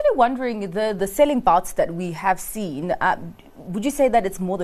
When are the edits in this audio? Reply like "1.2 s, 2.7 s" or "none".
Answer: 1.0 s